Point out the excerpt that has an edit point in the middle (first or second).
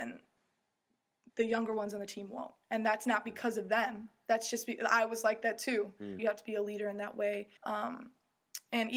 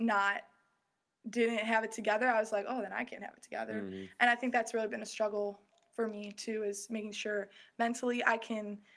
first